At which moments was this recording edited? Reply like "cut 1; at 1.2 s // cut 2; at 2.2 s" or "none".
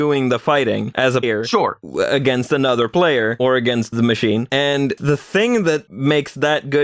cut 1; at 1.2 s